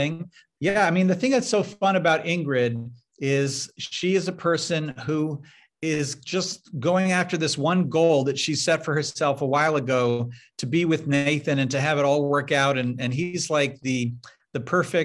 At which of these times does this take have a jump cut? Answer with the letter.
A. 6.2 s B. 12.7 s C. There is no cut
C